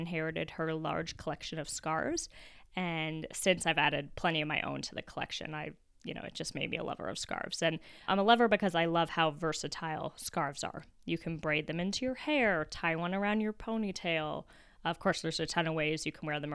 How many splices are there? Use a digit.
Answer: 1